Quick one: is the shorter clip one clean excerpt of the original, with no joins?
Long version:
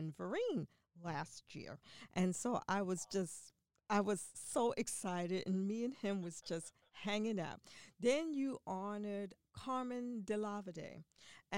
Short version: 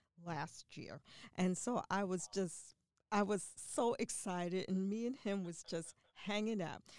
yes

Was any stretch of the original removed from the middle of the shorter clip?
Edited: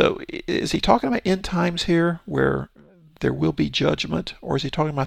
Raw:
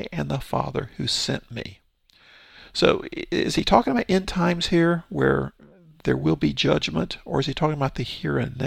no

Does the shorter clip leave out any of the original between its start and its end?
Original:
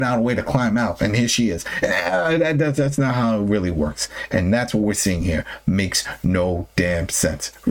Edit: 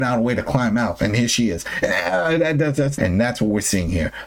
yes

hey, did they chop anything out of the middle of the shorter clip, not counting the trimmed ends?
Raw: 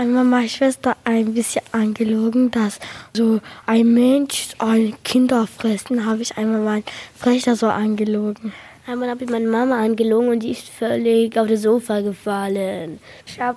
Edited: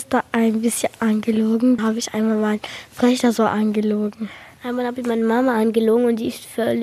yes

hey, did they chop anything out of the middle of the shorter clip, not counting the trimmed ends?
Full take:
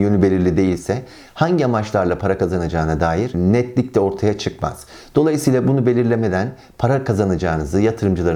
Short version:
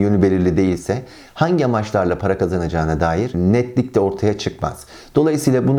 no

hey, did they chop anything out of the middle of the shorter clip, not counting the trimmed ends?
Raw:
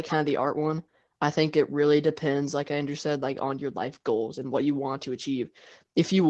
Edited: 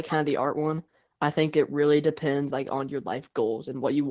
yes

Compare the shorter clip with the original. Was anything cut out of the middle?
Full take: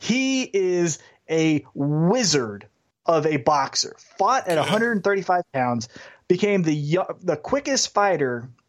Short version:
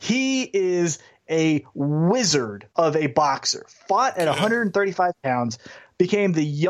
yes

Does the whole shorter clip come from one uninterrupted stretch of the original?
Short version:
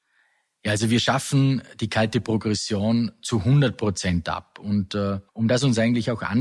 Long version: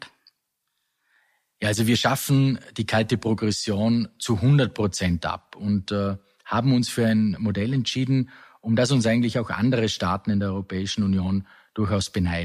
no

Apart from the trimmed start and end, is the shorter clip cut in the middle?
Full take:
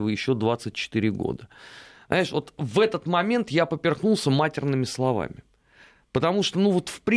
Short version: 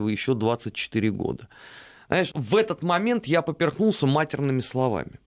yes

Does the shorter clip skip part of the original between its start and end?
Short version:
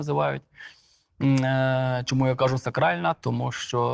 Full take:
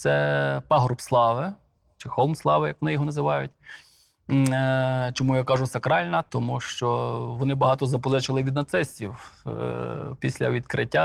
no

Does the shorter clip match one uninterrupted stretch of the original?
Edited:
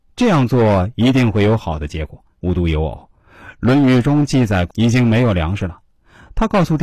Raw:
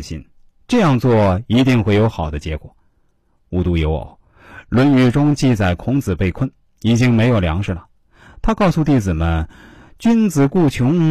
no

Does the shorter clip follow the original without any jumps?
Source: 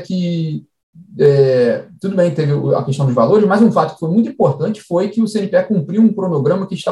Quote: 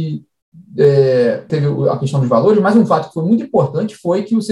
no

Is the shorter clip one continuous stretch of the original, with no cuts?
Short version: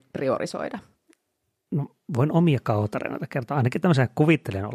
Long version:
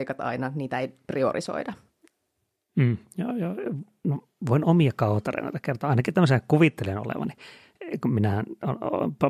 no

